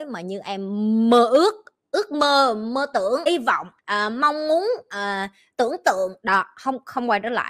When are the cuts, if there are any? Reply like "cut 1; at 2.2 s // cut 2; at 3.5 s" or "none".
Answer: cut 1; at 3.2 s